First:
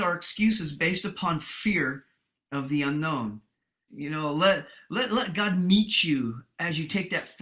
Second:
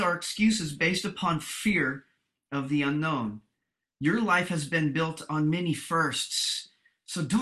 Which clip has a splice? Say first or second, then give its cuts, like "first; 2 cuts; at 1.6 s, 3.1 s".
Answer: first; 1 cut; at 3.9 s